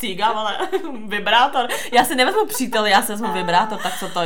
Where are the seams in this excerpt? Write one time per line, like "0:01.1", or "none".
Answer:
none